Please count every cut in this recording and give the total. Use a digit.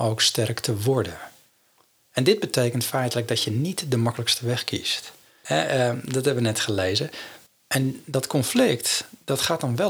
2